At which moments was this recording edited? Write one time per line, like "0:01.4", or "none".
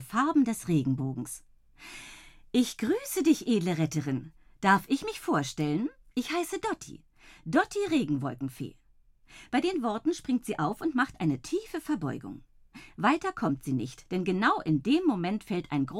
none